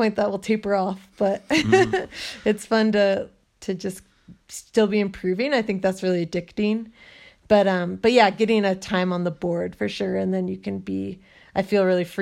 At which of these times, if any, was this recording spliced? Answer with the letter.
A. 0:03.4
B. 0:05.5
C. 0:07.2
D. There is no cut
A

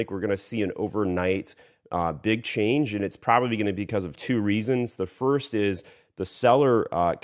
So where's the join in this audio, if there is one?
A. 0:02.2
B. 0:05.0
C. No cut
C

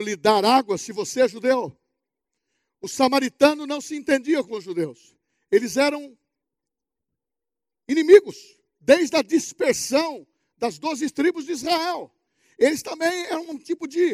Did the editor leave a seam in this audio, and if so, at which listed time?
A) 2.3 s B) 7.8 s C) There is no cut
C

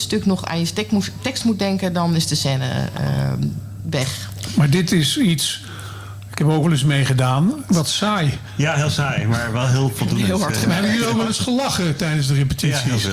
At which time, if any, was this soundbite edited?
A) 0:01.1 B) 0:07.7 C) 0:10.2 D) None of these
B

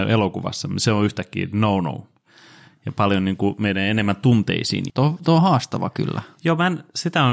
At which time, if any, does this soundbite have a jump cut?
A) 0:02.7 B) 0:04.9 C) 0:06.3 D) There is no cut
B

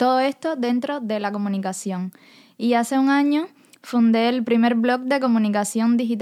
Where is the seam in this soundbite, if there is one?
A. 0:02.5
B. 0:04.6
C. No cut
C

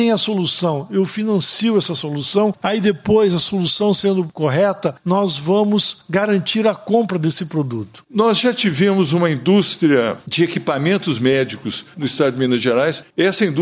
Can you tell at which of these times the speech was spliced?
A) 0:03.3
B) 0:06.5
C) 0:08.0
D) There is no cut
C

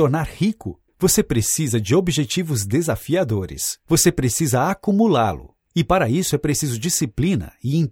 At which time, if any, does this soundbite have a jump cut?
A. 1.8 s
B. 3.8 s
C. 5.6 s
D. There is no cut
B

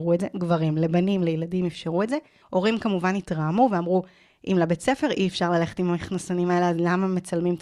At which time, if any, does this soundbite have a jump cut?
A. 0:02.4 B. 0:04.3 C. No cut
A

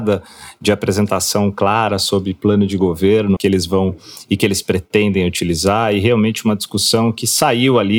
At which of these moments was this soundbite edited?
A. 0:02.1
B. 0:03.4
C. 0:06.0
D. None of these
B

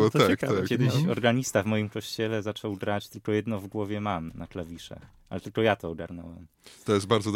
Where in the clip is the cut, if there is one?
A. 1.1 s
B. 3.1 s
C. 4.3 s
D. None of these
C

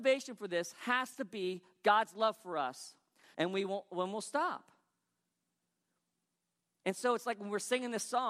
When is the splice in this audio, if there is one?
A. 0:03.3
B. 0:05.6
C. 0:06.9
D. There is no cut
A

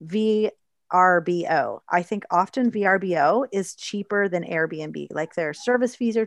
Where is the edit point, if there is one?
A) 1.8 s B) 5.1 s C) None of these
C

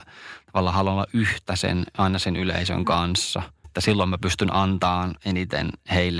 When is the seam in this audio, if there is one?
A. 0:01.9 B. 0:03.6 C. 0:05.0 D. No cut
B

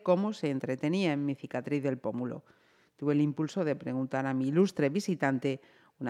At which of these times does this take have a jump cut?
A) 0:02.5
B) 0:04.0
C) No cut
C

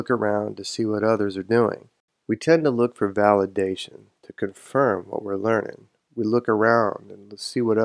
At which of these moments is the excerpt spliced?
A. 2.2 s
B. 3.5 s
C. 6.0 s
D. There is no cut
D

